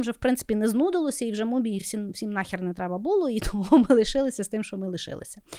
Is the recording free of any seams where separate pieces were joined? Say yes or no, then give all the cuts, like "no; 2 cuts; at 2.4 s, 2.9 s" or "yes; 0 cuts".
yes; 0 cuts